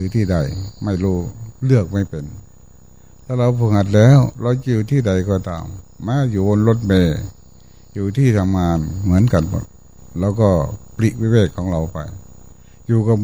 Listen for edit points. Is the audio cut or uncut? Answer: uncut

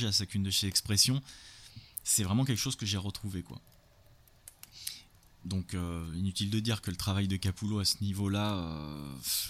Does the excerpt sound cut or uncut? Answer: uncut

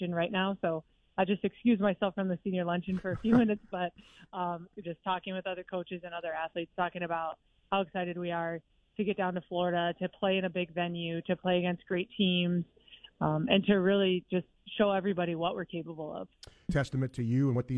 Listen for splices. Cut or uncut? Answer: cut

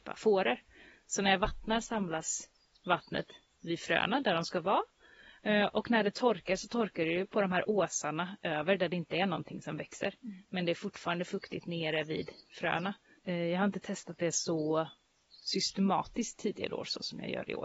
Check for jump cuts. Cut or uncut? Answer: cut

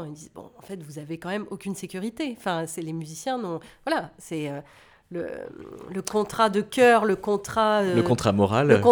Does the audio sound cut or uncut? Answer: uncut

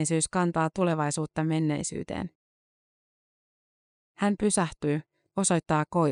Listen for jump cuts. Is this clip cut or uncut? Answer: uncut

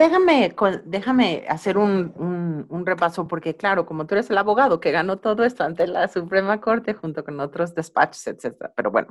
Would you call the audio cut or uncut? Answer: uncut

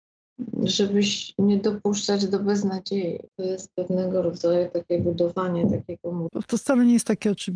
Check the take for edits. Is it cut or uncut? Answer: cut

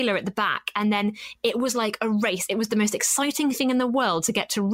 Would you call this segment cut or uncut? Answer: uncut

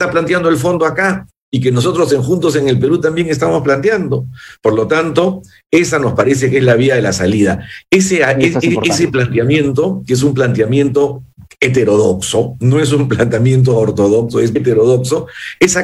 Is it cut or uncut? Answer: cut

